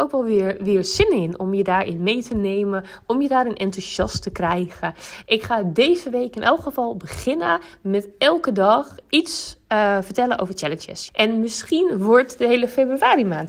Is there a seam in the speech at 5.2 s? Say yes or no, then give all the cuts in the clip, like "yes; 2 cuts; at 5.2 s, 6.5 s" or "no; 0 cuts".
yes; 2 cuts; at 5.2 s, 11.1 s